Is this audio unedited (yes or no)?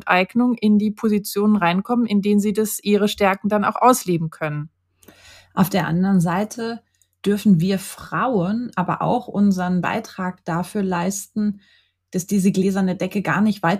yes